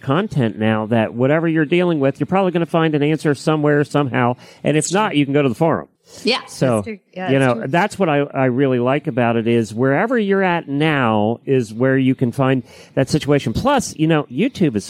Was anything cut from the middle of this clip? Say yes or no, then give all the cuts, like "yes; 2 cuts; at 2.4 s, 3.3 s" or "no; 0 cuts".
no; 0 cuts